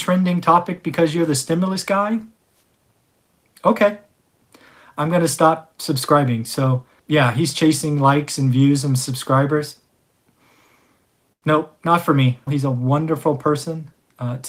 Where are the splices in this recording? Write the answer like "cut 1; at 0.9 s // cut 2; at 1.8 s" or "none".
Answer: cut 1; at 7.0 s // cut 2; at 12.5 s

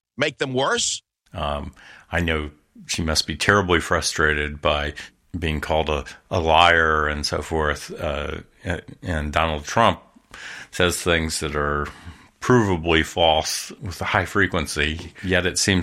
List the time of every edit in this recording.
cut 1; at 1.3 s // cut 2; at 13.8 s

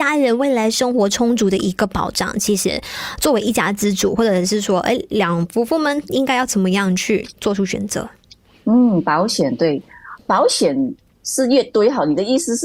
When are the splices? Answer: none

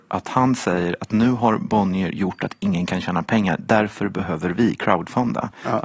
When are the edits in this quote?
none

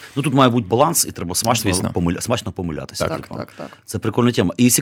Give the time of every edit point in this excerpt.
none

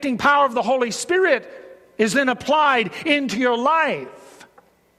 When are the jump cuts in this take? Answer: none

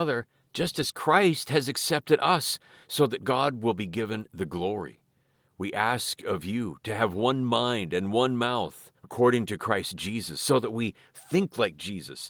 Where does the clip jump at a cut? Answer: cut 1; at 9.0 s

